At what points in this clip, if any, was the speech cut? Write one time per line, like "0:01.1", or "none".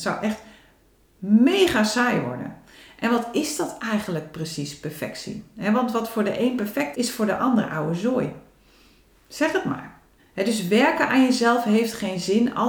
0:06.9
0:10.2

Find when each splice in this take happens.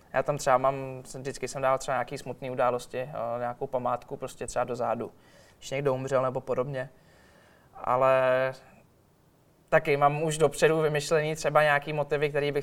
none

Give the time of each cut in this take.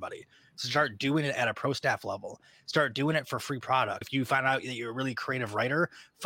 0:04.0

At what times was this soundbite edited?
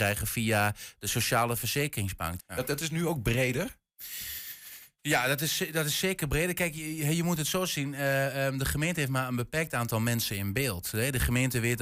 0:02.4

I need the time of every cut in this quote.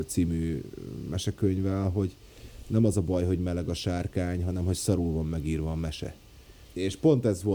0:06.7

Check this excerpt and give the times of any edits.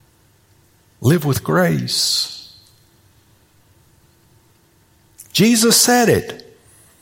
0:05.2

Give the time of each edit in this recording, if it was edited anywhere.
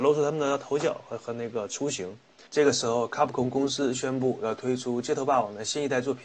0:02.5

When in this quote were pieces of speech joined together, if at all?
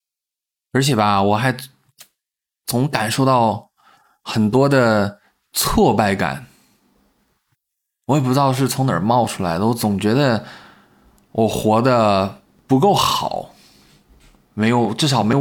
none

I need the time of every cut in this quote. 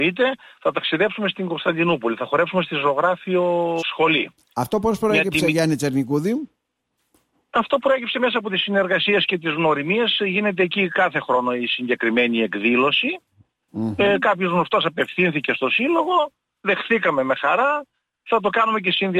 0:03.8

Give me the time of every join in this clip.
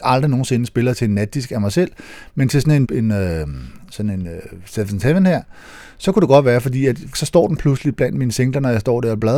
0:02.8
0:07.1

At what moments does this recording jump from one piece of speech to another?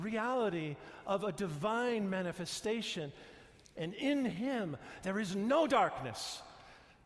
0:03.7

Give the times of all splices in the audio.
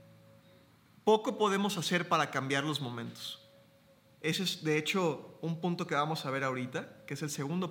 none

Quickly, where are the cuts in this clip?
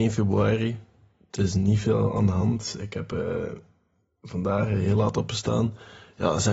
none

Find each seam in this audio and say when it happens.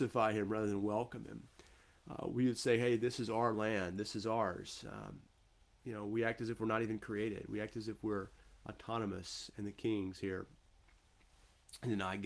none

